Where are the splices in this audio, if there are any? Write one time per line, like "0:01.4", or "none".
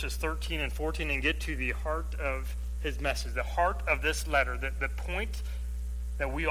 none

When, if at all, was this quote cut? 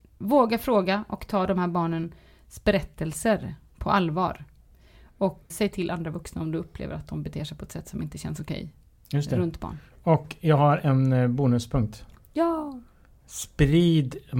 0:05.5

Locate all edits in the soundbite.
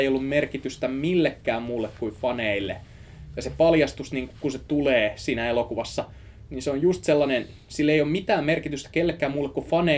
none

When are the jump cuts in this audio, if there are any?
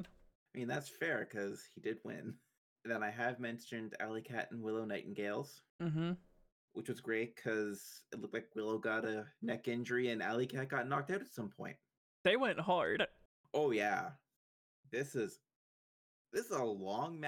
none

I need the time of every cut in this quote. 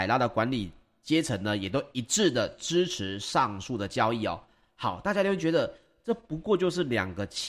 none

